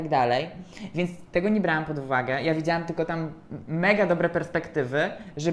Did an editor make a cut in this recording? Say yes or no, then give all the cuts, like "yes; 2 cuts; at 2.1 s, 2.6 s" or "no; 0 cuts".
no; 0 cuts